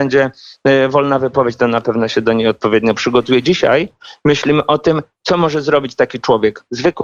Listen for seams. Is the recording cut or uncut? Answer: uncut